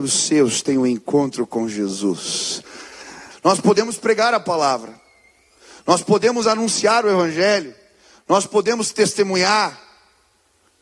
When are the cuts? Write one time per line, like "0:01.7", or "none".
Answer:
0:03.3